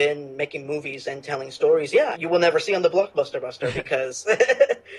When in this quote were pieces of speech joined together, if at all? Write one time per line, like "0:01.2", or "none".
0:02.1